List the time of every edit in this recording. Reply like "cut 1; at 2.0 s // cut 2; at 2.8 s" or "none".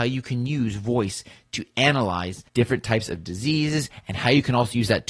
cut 1; at 2.5 s